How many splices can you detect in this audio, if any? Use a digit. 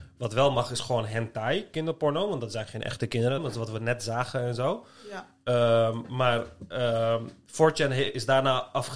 1